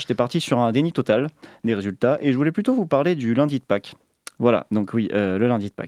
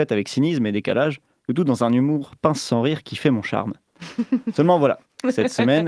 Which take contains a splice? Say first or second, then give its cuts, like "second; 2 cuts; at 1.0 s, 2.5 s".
first; 1 cut; at 4.4 s